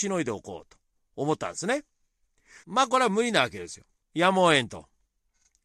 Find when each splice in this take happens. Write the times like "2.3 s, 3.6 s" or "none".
2.6 s, 4.0 s

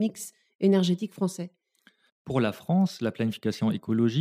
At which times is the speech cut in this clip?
2.1 s

